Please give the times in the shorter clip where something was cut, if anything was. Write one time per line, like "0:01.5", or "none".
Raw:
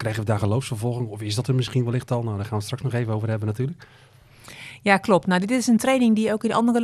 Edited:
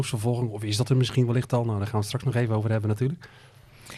none